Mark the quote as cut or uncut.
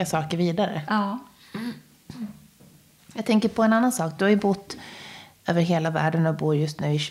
uncut